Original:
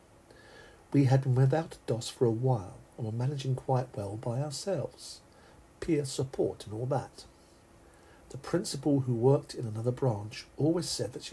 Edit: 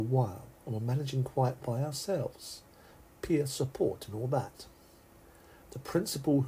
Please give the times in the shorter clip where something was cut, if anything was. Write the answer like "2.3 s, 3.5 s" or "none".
1.6 s